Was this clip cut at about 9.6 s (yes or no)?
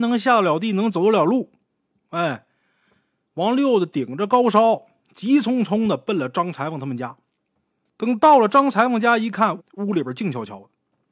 yes